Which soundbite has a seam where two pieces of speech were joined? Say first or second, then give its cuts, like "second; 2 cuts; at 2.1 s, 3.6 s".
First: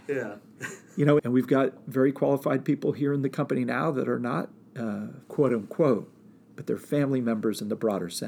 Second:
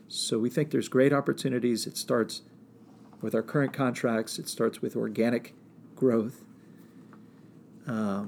first; 2 cuts; at 1.2 s, 5.2 s